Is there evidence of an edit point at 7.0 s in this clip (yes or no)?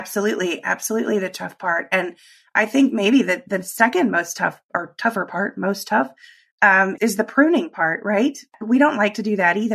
yes